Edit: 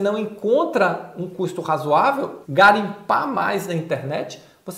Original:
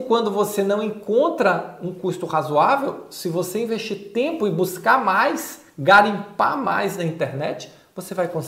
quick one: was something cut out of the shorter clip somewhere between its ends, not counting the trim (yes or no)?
yes